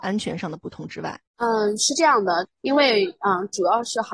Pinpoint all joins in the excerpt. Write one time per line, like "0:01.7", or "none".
0:01.3
0:02.5